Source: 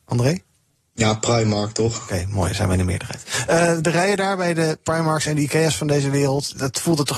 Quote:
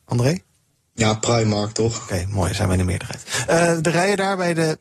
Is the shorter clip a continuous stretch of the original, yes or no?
yes